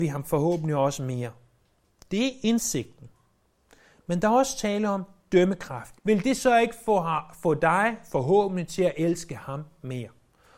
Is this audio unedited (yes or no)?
no